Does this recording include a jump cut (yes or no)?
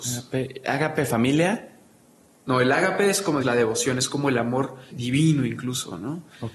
yes